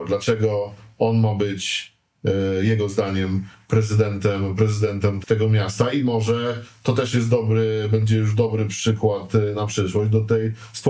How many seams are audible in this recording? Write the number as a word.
one